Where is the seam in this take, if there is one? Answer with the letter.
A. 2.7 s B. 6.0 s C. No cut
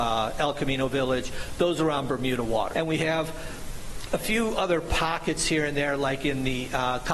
A